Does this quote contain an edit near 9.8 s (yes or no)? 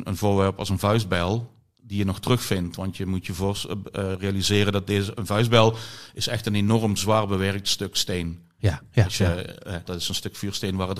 yes